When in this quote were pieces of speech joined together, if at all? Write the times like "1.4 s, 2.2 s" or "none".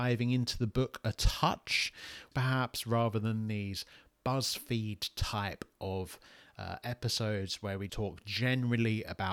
2.3 s, 7.9 s